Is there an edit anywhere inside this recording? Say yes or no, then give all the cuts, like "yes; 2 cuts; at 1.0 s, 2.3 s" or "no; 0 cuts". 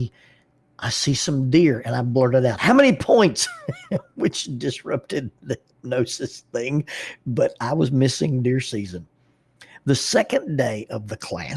no; 0 cuts